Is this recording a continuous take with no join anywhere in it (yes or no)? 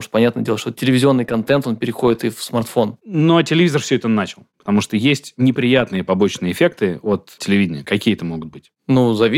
no